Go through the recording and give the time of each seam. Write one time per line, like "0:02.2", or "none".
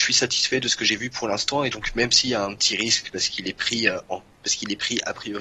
none